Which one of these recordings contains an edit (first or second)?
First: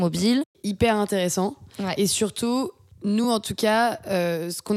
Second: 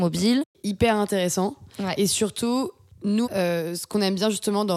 second